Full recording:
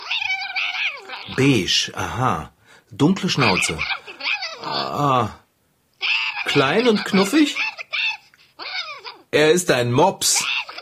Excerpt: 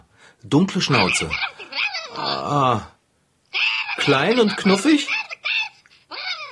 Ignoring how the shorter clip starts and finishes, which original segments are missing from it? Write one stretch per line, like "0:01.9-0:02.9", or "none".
none